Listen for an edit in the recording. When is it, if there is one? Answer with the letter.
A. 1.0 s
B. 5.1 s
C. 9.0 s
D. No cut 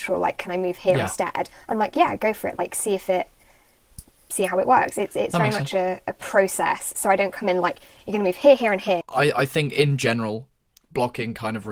C